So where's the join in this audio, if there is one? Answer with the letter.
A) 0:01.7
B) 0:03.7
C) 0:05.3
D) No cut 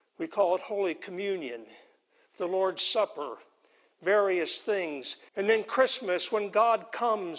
C